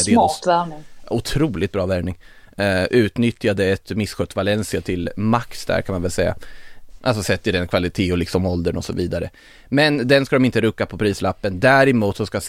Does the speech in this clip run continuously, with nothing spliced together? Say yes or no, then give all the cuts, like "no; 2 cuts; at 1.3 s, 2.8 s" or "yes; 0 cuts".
no; 1 cut; at 7.0 s